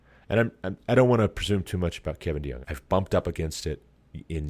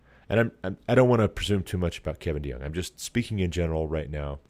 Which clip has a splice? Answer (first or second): first